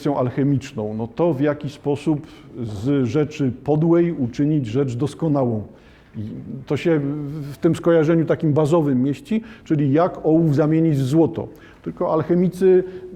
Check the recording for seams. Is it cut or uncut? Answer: uncut